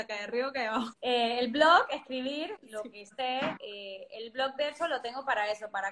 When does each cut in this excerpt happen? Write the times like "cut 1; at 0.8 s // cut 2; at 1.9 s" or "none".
cut 1; at 0.9 s // cut 2; at 2.6 s // cut 3; at 3.6 s